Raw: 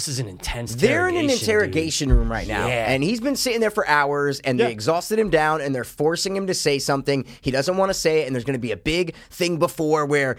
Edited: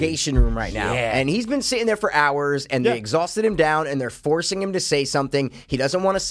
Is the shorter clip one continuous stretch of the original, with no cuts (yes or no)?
yes